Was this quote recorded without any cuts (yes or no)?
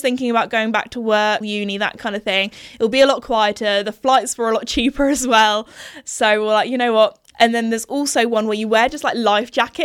no